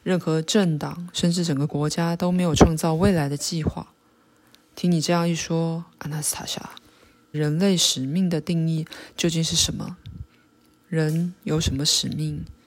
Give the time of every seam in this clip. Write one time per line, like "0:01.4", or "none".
0:07.3